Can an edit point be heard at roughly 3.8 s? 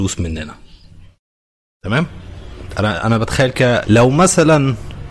yes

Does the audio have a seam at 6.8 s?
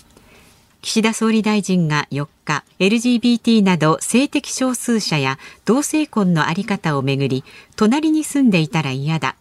no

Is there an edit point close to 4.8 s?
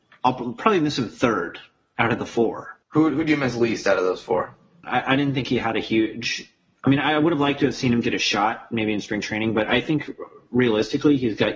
yes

